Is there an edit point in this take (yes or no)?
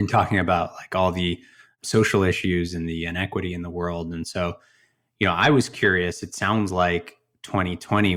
no